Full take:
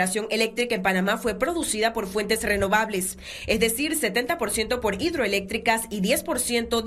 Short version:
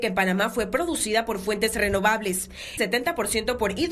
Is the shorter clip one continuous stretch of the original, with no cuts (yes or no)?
no